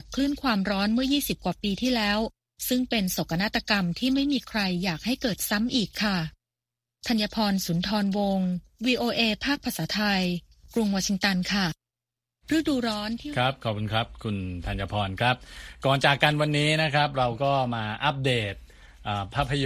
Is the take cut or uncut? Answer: uncut